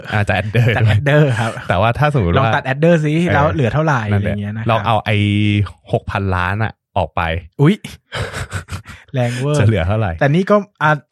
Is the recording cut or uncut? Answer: uncut